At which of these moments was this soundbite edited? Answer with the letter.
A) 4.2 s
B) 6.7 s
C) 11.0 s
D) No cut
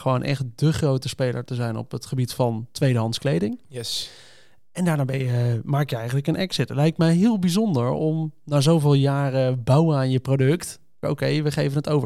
C